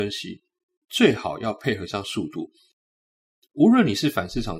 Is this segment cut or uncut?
uncut